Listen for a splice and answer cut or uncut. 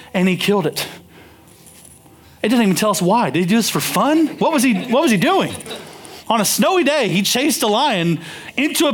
uncut